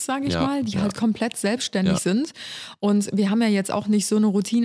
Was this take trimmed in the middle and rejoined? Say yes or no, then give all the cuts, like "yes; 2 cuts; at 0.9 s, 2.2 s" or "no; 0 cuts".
no; 0 cuts